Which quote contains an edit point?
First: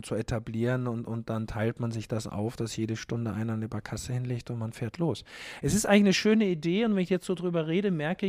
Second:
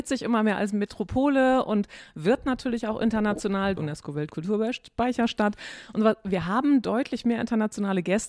second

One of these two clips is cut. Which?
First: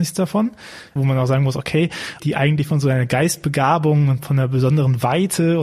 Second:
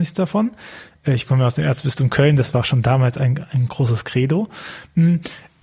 first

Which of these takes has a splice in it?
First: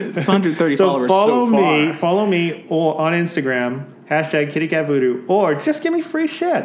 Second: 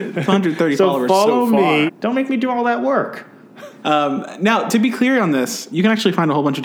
second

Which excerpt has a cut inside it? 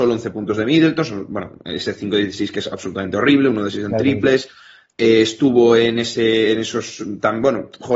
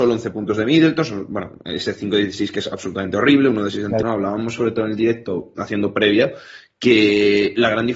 second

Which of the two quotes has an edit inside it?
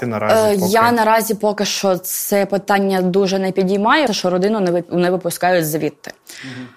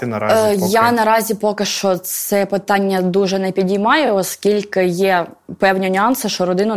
first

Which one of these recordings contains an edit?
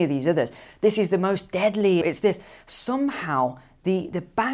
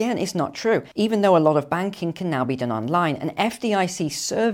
first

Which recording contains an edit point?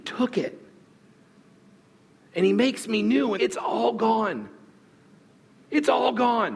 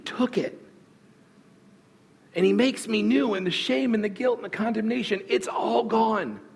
first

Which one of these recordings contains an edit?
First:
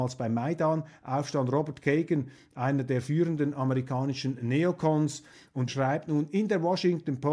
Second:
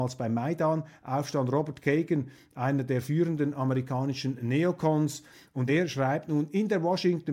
first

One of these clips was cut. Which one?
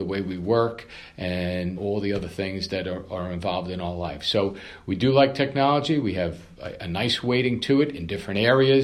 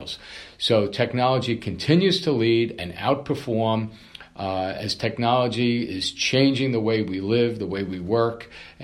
first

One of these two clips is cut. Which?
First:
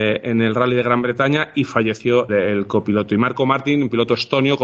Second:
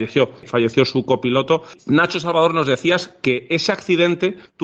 first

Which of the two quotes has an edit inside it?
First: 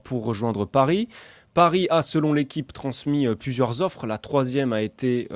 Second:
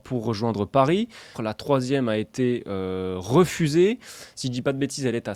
second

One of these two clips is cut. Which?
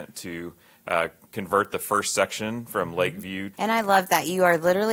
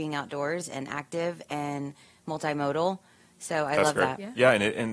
first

